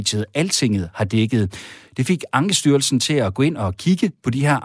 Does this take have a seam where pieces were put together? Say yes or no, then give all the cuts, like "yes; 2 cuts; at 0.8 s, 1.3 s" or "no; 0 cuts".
yes; 1 cut; at 1.9 s